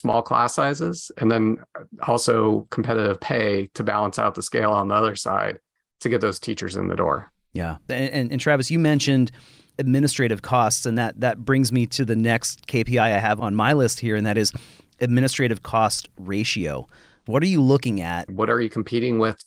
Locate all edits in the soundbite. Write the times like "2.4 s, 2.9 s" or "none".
7.9 s, 17.3 s, 18.3 s